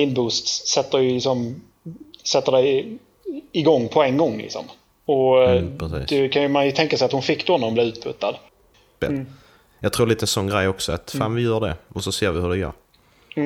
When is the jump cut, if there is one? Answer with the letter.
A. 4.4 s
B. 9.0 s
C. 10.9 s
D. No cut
B